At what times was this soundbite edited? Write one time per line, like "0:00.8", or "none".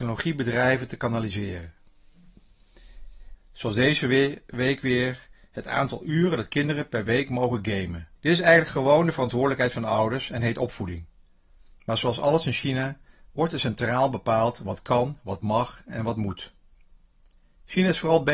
0:03.3
0:08.2